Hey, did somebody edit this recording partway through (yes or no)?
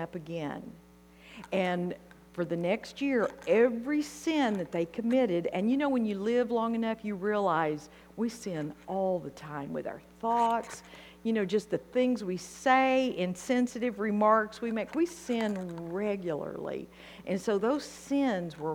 no